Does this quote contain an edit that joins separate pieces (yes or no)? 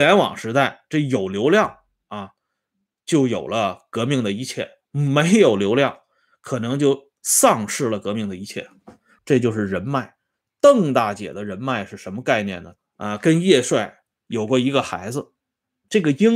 yes